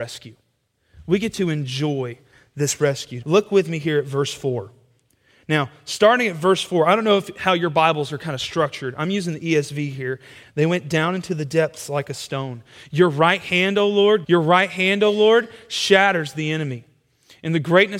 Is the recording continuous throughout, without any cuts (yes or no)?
no